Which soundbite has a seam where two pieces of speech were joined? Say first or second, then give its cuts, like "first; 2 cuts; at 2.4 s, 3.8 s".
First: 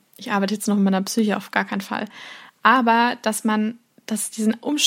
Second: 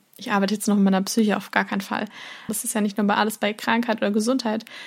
second; 1 cut; at 2.5 s